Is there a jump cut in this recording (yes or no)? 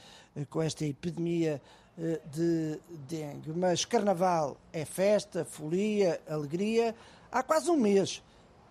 no